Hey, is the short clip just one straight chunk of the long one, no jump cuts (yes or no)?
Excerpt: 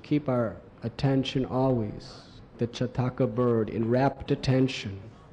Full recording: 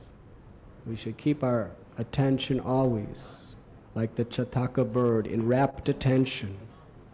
no